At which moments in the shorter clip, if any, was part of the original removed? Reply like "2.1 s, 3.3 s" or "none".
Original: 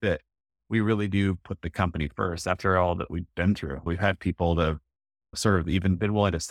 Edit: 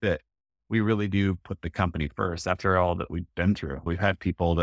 none